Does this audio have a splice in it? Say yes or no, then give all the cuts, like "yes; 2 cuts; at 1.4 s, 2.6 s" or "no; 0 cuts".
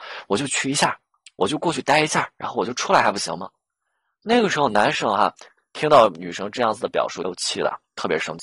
yes; 1 cut; at 7.2 s